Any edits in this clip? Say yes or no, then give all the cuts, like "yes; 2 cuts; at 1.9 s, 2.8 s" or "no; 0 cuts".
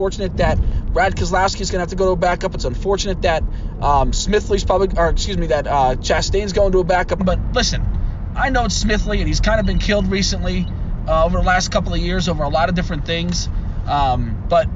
yes; 2 cuts; at 7.2 s, 8.3 s